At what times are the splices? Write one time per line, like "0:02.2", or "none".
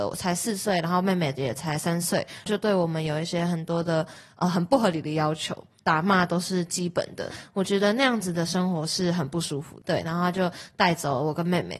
0:09.8